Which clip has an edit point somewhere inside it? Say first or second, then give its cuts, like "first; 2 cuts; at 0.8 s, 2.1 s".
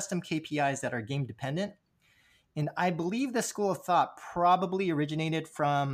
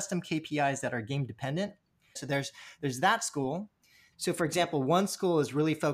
second; 2 cuts; at 2.2 s, 4.1 s